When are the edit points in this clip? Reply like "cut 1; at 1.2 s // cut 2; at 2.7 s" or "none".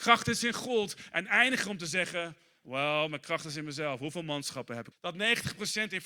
cut 1; at 4.9 s